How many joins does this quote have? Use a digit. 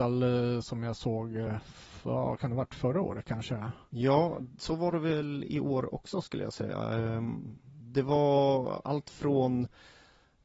0